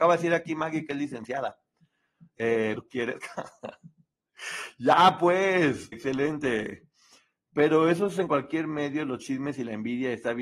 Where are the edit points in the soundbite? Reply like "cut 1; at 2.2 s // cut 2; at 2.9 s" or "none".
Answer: cut 1; at 2.7 s // cut 2; at 5.9 s